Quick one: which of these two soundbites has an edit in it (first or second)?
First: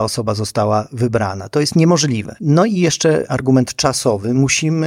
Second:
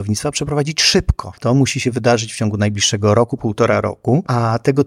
second